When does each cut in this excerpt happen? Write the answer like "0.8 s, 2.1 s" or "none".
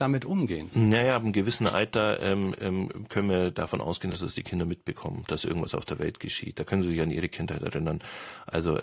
none